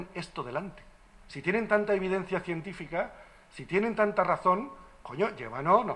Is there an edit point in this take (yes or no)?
yes